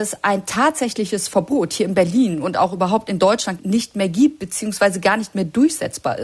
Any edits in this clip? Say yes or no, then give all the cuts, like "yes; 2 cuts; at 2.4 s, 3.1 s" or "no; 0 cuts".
yes; 1 cut; at 3.6 s